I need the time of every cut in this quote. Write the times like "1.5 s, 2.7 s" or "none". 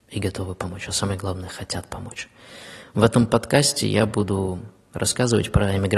none